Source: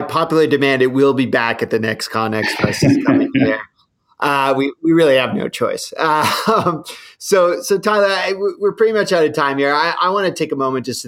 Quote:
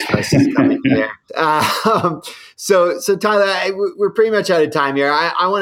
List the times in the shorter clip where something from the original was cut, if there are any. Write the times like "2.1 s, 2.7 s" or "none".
1.3 s